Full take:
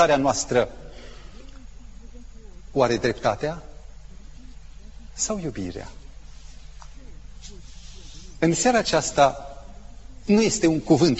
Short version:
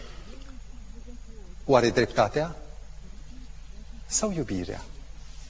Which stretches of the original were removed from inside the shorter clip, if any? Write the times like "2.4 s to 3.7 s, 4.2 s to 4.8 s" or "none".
none